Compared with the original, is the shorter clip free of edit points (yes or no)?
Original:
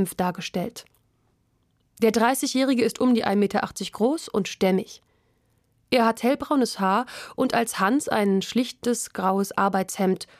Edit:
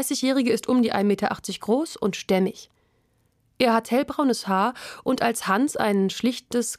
yes